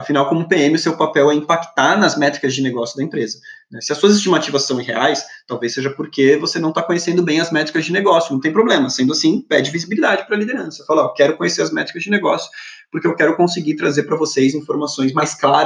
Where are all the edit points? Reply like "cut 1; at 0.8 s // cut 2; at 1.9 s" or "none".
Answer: none